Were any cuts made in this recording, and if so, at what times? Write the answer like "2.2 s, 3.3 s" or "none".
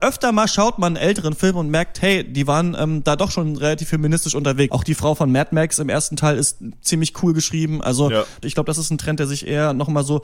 4.7 s, 8.4 s